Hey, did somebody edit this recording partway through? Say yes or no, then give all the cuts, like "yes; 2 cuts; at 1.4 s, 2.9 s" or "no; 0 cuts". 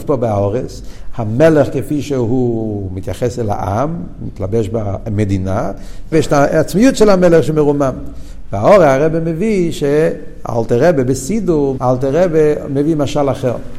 yes; 3 cuts; at 1.1 s, 6.1 s, 11.8 s